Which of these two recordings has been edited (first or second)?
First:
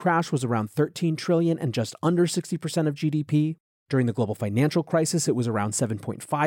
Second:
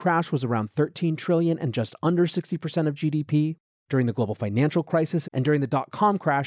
second